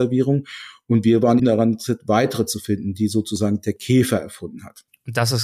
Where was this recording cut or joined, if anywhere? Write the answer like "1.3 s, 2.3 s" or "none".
1.4 s